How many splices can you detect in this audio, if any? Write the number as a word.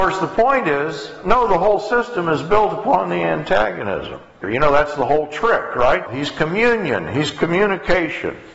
two